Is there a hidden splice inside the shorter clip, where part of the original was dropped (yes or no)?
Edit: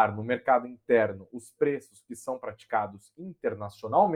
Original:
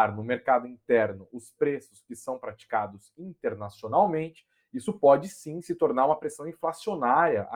no